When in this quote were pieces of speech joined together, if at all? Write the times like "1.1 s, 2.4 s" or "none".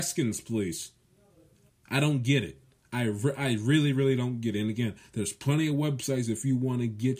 1.7 s